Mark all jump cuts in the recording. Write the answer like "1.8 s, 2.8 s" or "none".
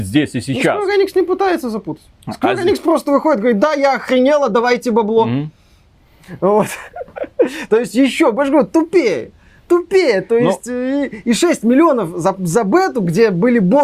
none